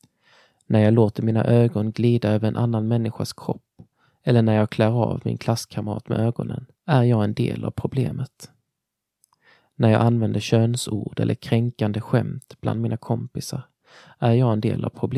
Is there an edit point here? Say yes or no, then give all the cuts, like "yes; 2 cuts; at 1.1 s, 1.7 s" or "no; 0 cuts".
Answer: yes; 1 cut; at 6.7 s